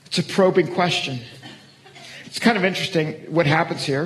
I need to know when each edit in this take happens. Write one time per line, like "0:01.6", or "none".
0:02.2